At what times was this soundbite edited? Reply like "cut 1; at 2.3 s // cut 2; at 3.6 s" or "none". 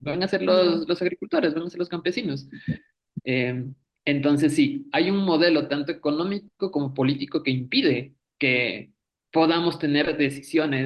none